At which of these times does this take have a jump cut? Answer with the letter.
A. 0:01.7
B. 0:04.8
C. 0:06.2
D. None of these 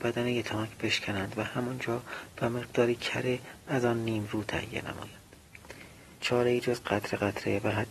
C